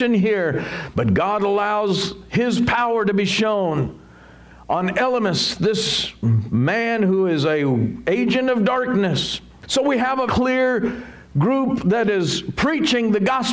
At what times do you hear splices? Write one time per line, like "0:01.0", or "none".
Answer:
0:00.9
0:10.3